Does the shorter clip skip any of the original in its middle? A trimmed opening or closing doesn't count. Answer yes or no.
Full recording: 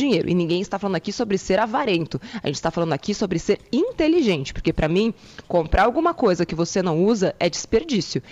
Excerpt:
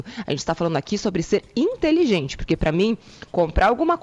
no